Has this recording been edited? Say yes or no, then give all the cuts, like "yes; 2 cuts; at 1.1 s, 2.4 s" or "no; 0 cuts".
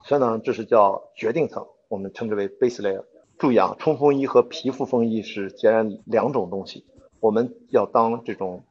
yes; 1 cut; at 3.2 s